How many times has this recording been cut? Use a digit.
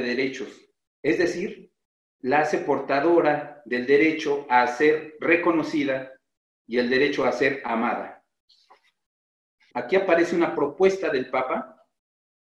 1